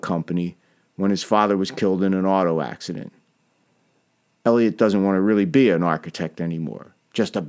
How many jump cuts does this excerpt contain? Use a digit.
0